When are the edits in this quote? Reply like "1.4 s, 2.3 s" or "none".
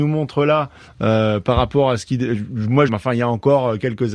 2.9 s